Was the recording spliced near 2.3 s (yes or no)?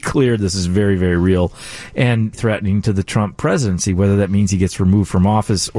yes